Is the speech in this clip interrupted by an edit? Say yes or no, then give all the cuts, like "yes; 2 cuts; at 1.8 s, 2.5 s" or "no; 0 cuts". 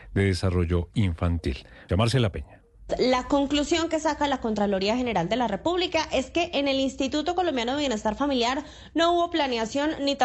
yes; 1 cut; at 1.9 s